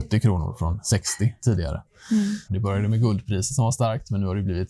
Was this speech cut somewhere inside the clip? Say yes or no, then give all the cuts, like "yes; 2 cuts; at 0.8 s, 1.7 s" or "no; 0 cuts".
yes; 1 cut; at 2.5 s